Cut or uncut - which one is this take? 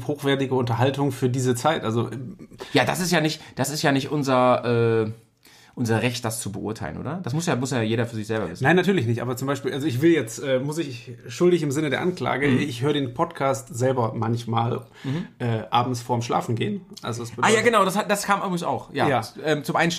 uncut